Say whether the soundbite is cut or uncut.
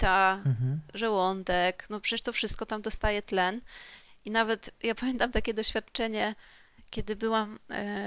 uncut